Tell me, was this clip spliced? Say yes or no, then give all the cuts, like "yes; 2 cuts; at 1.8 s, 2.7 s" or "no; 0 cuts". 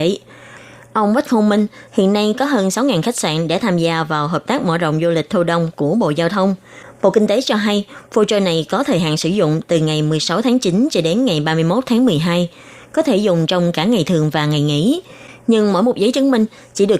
yes; 1 cut; at 1.9 s